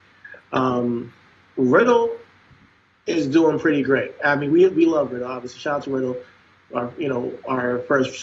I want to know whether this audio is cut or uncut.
uncut